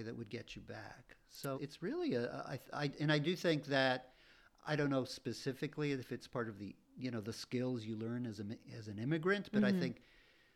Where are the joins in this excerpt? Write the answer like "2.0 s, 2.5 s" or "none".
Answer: 1.5 s, 6.8 s